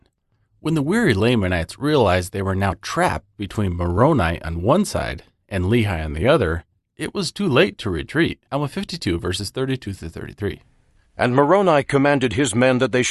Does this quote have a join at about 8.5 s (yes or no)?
yes